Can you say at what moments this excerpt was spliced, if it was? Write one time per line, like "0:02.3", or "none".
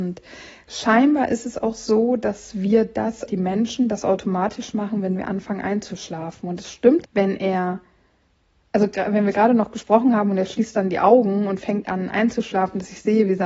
0:03.3
0:07.0